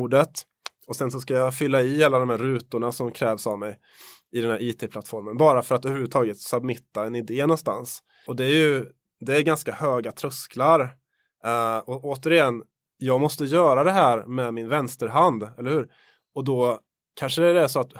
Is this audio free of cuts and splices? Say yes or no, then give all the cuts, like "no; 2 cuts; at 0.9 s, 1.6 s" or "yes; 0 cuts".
yes; 0 cuts